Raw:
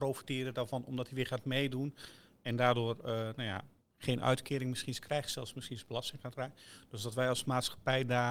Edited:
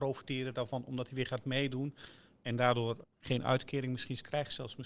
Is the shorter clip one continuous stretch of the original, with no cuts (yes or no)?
no